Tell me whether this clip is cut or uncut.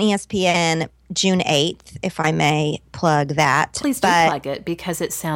uncut